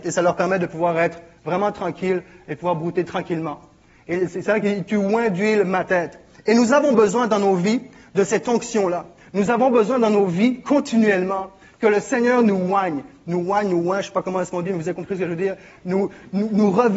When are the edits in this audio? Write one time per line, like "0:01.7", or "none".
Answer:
none